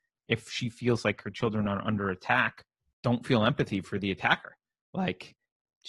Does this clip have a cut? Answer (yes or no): no